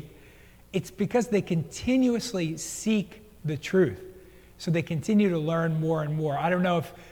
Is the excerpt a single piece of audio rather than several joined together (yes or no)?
yes